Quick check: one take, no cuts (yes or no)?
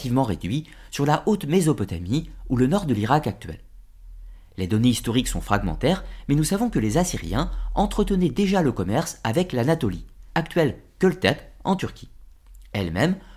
no